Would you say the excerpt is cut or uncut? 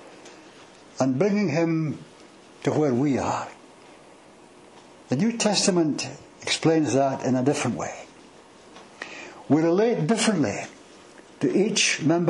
uncut